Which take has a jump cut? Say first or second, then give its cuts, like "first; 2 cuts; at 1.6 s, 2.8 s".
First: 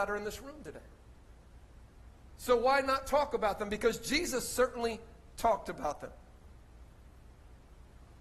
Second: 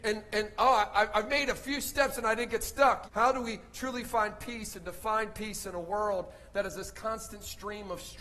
second; 1 cut; at 3.0 s